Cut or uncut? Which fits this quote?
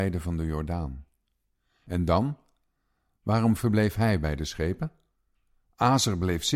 uncut